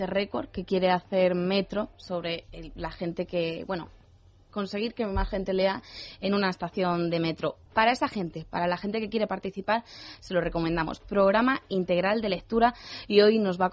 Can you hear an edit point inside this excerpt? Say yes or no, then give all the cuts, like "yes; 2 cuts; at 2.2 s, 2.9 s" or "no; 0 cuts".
no; 0 cuts